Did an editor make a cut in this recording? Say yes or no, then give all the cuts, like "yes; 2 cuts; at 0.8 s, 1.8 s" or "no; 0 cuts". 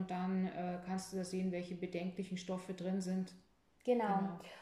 no; 0 cuts